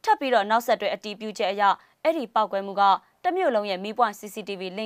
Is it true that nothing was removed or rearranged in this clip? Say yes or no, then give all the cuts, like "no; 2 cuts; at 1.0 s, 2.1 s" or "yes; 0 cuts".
yes; 0 cuts